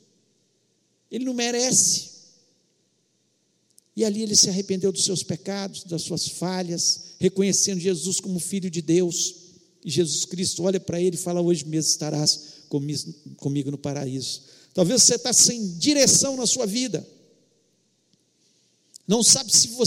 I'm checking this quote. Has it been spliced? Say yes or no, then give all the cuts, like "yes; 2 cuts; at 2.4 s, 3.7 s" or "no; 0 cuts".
no; 0 cuts